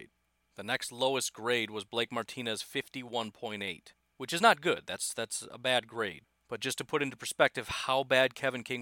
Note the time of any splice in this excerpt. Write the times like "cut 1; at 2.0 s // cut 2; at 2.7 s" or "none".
none